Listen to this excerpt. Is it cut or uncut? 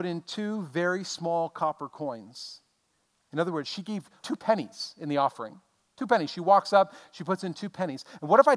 cut